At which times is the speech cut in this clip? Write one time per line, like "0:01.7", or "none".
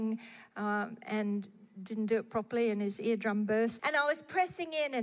0:03.8